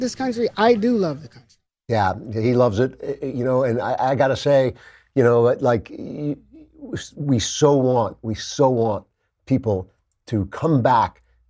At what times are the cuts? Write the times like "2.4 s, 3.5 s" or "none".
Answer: none